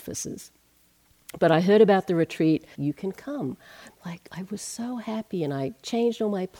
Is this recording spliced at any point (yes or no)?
yes